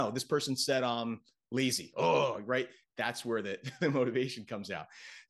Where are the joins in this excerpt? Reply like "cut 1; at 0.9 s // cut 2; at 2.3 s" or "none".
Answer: none